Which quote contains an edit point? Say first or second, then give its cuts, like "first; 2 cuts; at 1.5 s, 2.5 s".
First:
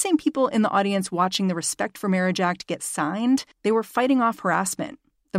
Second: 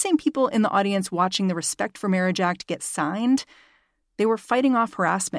first; 1 cut; at 3.5 s